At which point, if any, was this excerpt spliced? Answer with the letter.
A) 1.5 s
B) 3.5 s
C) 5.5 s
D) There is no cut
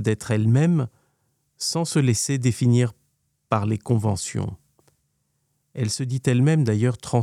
D